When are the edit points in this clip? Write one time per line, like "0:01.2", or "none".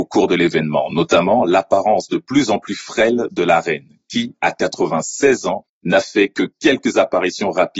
none